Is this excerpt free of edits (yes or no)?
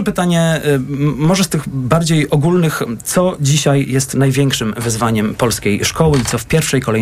yes